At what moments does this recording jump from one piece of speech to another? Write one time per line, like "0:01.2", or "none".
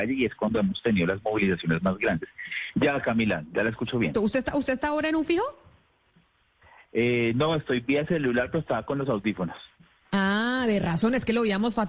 0:02.7
0:04.1